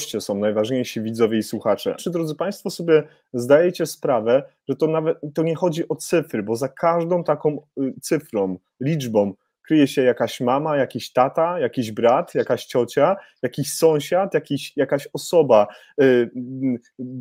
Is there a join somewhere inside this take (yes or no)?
yes